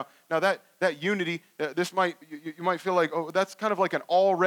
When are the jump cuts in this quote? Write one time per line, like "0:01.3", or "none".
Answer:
0:02.2